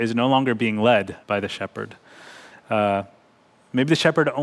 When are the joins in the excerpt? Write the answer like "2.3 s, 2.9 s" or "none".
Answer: 1.2 s